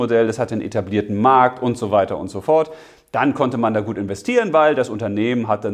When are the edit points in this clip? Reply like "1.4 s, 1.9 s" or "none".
none